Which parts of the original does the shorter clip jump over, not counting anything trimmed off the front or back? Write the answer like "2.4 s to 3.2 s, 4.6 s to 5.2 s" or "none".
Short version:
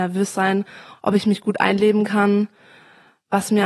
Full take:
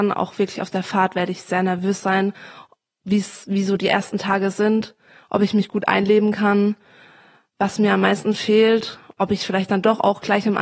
2.6 s to 5.2 s